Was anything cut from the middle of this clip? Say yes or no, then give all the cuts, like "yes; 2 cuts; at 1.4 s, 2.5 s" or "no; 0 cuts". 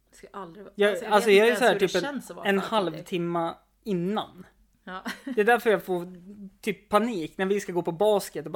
no; 0 cuts